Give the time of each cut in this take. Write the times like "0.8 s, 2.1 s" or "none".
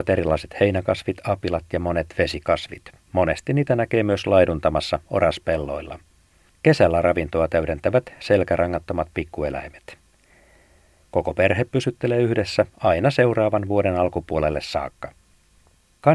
11.0 s